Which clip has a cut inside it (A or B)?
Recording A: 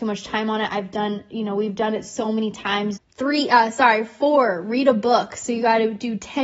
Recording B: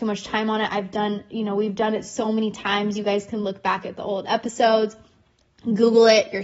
A